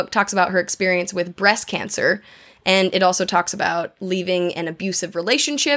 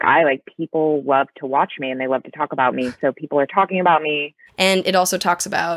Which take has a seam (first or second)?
second